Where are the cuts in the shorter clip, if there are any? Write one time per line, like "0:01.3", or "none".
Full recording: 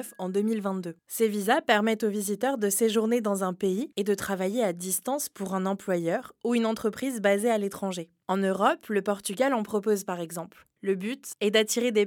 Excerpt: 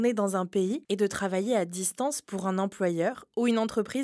none